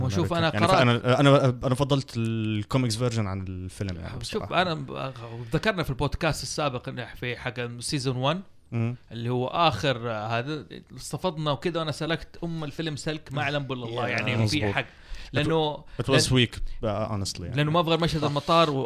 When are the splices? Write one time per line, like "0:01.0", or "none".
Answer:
none